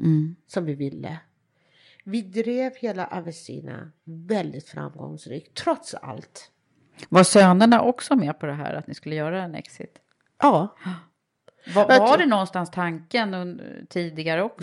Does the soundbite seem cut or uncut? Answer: uncut